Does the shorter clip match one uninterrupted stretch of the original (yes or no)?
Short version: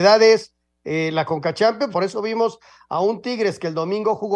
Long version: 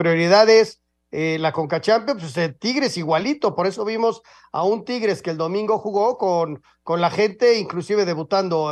no